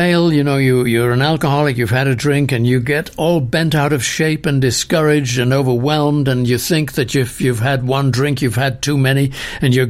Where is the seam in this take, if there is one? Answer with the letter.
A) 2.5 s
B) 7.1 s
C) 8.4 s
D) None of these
D